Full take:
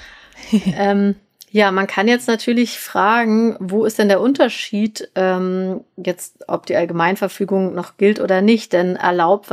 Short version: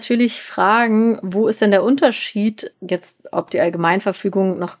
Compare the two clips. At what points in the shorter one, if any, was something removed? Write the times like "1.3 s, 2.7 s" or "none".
2.7 s